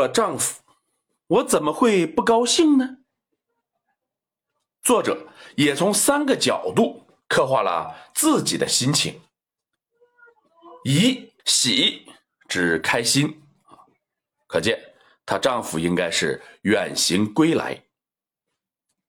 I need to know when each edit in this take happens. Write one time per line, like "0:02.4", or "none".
0:11.4